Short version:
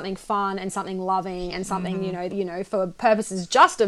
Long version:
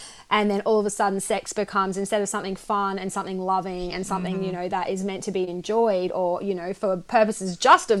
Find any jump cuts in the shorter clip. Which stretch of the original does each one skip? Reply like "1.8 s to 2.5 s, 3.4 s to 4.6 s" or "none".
4.7 s to 6.4 s